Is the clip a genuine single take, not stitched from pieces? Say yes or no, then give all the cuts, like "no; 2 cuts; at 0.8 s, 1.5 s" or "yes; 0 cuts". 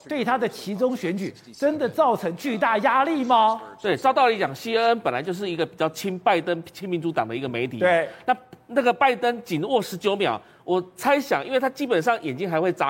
yes; 0 cuts